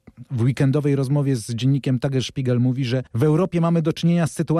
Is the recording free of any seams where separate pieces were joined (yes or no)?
no